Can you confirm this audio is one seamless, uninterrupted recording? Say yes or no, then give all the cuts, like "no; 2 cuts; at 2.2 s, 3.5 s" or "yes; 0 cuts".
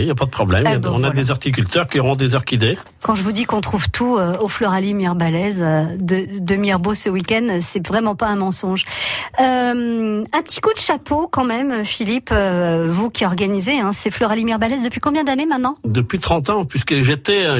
yes; 0 cuts